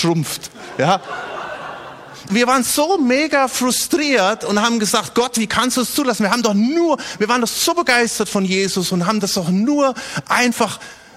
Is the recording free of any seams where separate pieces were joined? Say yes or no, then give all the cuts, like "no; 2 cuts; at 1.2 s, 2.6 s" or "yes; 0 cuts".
no; 1 cut; at 2.3 s